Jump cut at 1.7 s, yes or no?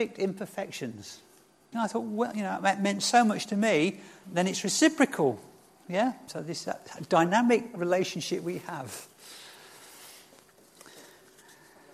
yes